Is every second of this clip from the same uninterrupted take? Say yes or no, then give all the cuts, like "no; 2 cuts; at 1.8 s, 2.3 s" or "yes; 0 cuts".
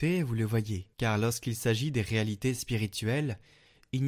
no; 1 cut; at 0.9 s